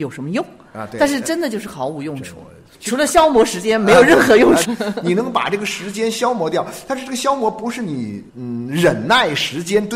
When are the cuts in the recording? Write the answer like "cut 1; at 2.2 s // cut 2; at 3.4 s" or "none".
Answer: cut 1; at 4.6 s // cut 2; at 8.3 s